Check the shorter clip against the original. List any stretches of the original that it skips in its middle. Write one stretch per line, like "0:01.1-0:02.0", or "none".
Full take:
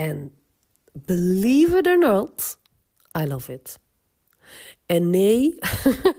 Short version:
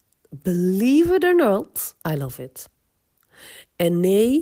0:02.6-0:03.1